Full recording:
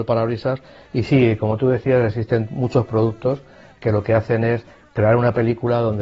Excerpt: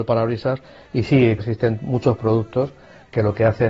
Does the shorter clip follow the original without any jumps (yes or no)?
no